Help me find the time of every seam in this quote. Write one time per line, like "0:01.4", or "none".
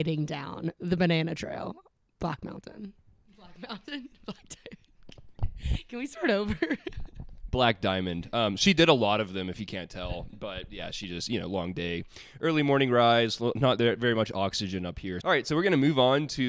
0:15.2